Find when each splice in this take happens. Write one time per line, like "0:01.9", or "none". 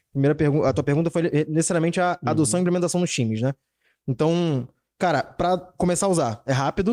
none